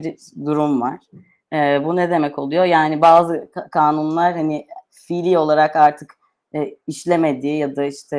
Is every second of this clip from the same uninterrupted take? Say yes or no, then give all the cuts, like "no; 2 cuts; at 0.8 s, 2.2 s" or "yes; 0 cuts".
yes; 0 cuts